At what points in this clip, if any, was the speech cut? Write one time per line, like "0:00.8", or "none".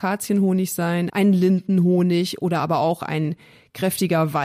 0:01.1

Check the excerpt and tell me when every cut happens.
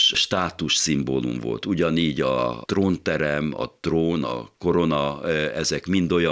0:04.2

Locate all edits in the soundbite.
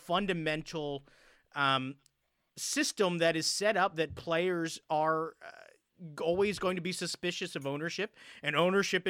none

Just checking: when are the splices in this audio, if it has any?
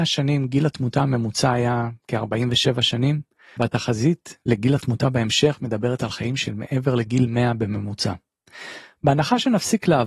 0:03.6

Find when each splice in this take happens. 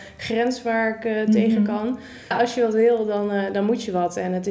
0:02.3

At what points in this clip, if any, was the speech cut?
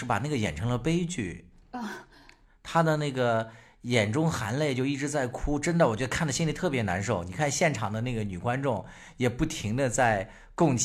none

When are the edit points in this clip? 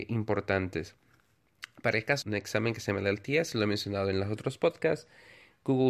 0:02.2

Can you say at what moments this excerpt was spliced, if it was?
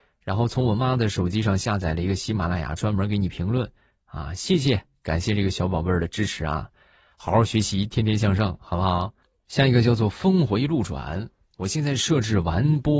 none

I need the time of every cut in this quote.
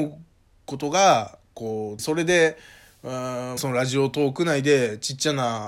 0:02.0
0:03.6

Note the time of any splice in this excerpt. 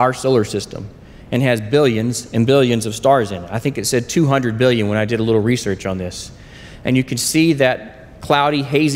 none

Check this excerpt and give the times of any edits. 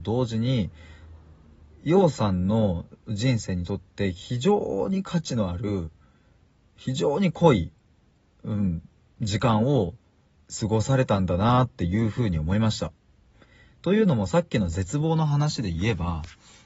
none

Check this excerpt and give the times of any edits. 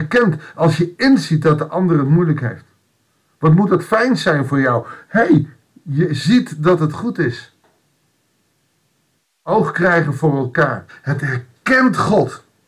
0:10.9

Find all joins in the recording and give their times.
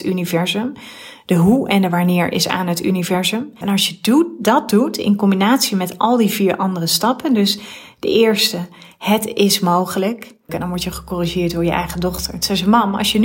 0:03.6
0:10.5

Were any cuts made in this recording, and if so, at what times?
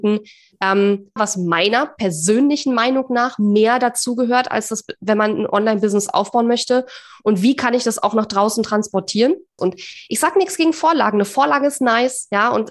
0:01.2
0:09.6

